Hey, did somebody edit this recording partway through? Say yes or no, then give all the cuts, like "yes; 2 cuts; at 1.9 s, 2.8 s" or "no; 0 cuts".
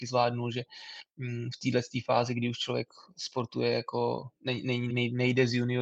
yes; 1 cut; at 4.9 s